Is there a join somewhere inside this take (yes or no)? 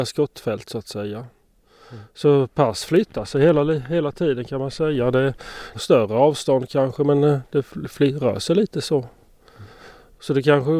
yes